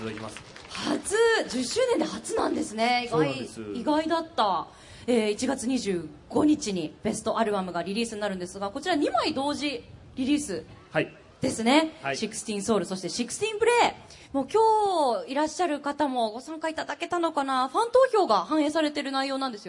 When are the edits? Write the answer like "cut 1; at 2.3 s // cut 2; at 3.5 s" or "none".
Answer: none